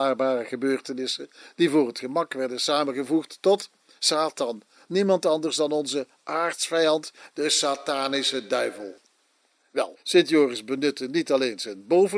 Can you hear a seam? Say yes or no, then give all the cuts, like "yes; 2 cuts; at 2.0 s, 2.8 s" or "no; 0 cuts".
no; 0 cuts